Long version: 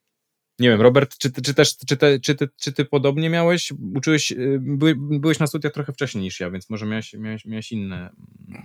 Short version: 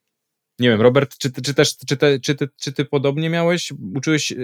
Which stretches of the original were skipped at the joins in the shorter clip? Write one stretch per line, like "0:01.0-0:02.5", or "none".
none